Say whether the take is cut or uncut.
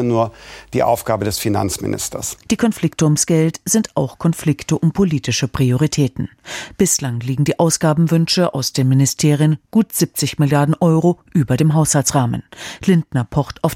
uncut